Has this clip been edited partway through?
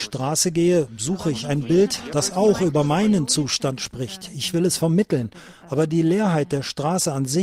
no; 0 cuts

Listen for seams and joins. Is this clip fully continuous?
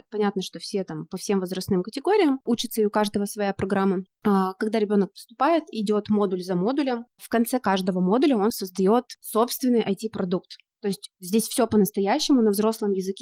yes; 0 cuts

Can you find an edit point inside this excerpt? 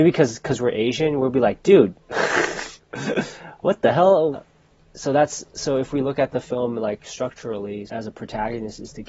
yes; 2 cuts; at 4.3 s, 7.9 s

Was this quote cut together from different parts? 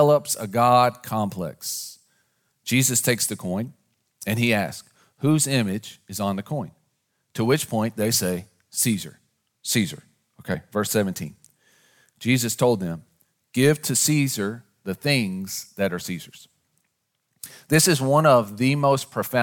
no; 0 cuts

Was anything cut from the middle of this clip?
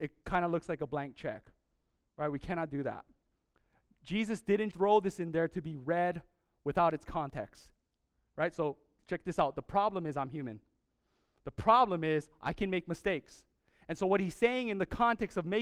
yes; 1 cut; at 4.7 s

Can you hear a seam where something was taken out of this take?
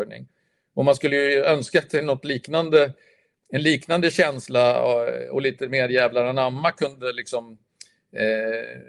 no; 0 cuts

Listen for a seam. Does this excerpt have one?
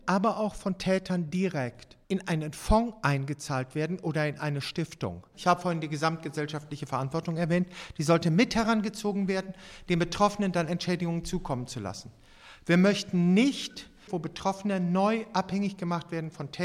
yes; 3 cuts; at 2.0 s, 5.3 s, 14.1 s

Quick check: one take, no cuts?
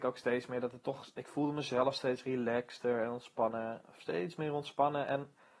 yes; 0 cuts

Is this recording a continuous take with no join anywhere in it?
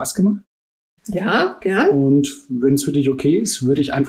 no; 1 cut; at 1.0 s

